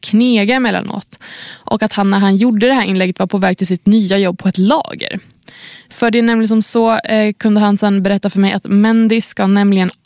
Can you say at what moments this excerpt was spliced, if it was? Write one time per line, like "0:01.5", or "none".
none